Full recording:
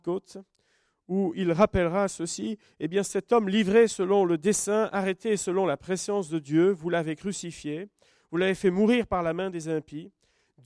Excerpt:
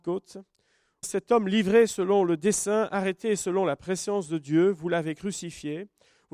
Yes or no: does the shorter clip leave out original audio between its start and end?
yes